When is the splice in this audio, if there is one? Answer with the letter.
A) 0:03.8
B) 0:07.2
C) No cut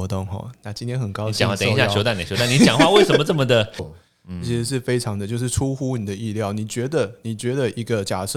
A